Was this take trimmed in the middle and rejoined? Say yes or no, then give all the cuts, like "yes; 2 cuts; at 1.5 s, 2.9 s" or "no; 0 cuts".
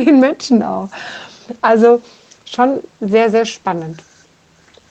no; 0 cuts